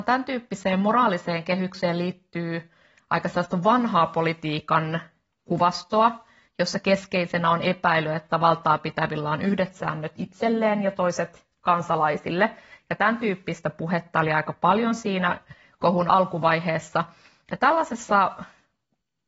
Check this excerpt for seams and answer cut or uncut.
uncut